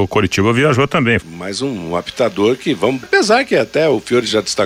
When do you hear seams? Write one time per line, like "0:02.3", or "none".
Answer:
0:01.2
0:03.0